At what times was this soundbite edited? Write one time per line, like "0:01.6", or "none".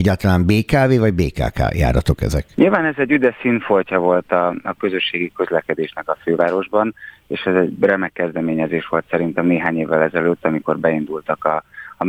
0:02.5

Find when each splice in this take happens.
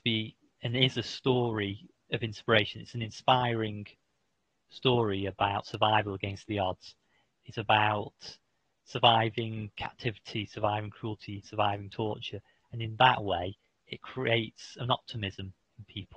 none

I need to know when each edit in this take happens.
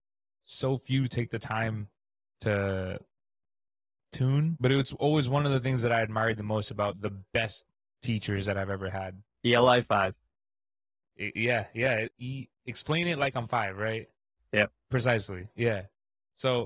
0:09.3

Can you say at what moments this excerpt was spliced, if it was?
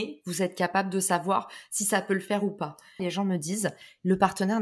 0:03.0

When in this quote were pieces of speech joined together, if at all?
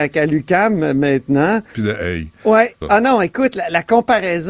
0:01.7
0:02.8

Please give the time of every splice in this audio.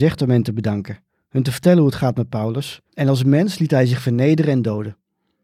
0:02.9

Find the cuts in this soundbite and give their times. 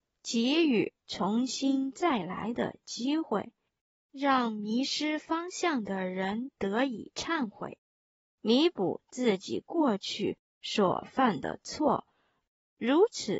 none

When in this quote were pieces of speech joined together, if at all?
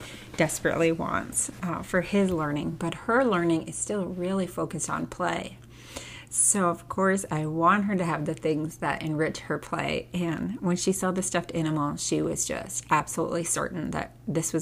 none

